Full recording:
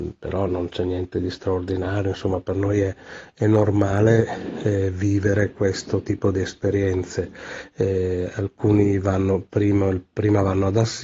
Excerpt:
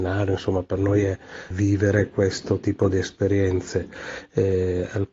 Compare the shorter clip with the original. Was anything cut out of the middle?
yes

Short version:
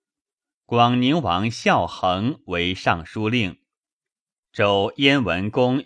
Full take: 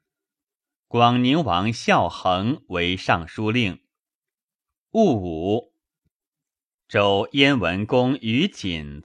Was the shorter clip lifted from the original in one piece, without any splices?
no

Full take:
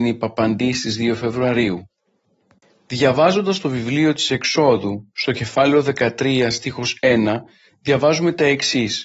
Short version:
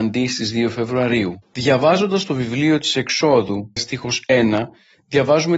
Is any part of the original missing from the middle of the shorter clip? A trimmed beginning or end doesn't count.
yes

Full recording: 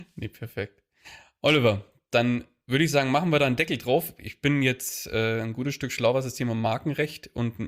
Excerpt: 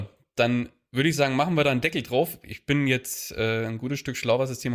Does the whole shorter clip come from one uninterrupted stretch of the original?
yes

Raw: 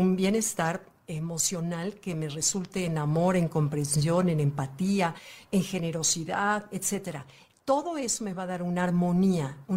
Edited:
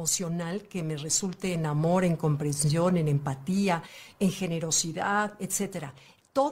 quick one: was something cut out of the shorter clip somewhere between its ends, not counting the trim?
no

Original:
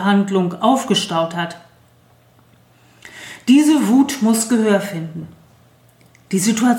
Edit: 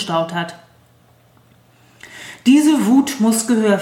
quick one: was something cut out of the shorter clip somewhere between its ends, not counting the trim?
no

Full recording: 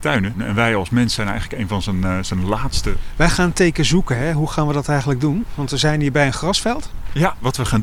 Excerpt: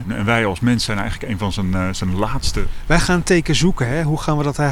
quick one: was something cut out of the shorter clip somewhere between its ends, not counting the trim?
no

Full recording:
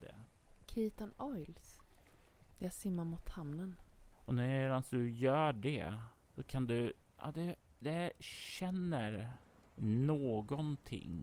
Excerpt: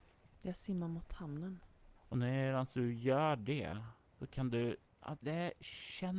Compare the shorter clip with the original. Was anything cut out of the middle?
yes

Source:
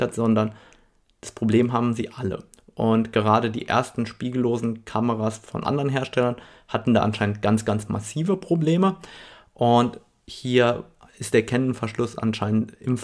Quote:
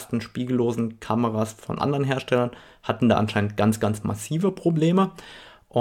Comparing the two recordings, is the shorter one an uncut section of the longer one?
yes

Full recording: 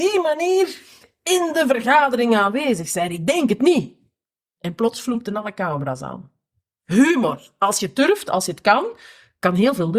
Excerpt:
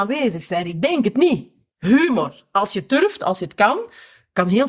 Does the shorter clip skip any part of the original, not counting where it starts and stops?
yes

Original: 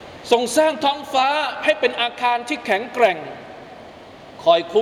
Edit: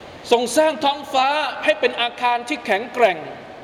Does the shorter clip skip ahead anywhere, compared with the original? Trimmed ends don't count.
no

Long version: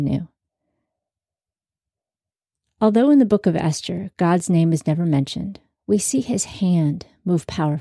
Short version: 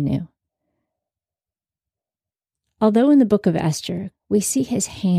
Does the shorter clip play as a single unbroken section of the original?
no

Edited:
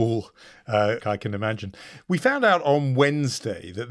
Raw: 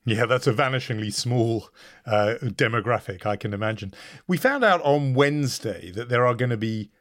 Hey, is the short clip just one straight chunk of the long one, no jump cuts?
no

